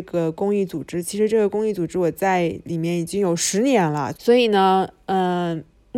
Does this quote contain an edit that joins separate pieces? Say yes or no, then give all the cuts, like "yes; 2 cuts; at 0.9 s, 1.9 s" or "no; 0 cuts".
yes; 1 cut; at 4.1 s